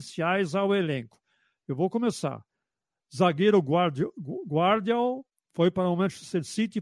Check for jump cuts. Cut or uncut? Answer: uncut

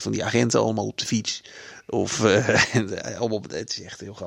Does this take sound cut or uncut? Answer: uncut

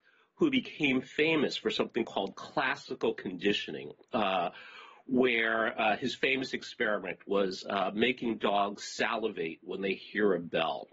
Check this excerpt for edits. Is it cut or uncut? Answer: uncut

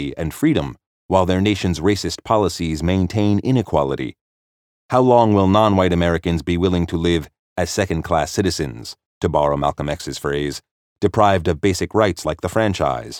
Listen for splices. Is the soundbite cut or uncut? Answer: uncut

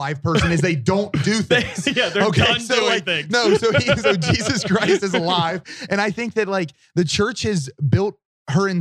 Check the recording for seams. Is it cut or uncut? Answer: uncut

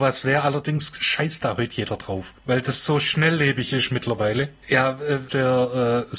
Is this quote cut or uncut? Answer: cut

